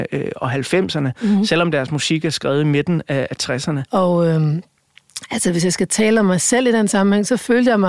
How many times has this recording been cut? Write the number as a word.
one